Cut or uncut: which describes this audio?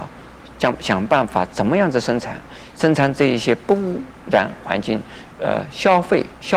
cut